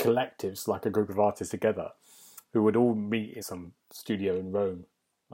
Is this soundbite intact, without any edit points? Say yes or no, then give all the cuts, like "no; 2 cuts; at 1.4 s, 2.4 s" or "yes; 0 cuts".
no; 1 cut; at 3.4 s